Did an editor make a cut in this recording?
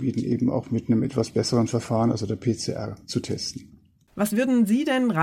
no; 0 cuts

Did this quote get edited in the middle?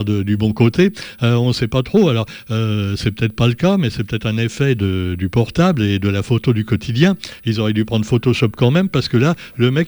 no; 0 cuts

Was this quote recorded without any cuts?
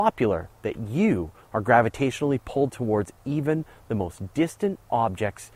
yes; 0 cuts

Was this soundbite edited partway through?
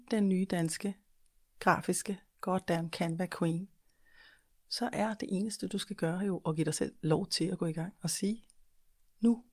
no; 0 cuts

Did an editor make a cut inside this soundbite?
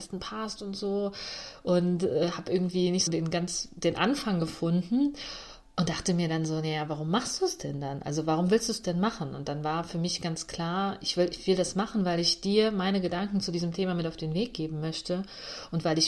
yes; 1 cut; at 3.1 s

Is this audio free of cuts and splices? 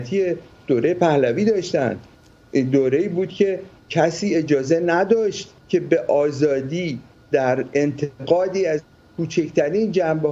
no; 1 cut; at 5.6 s

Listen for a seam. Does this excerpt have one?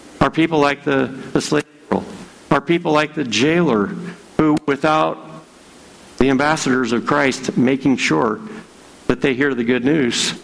no; 0 cuts

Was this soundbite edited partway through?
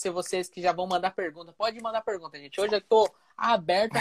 no; 0 cuts

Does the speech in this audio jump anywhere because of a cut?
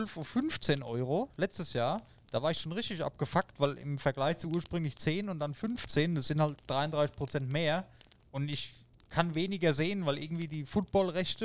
no; 0 cuts

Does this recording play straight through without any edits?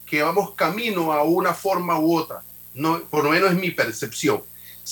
no; 1 cut; at 2.5 s

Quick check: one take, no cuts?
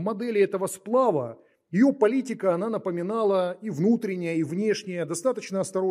yes; 0 cuts

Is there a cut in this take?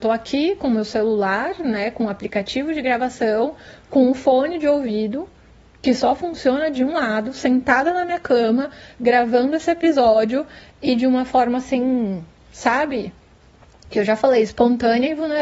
no; 0 cuts

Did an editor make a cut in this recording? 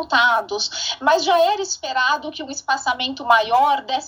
no; 0 cuts

